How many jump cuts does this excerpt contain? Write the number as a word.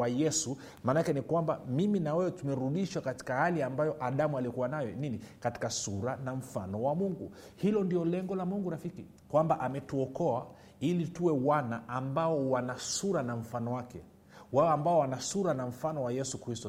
one